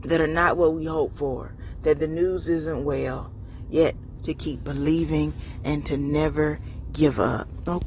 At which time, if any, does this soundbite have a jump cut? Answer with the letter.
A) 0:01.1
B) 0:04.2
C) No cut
B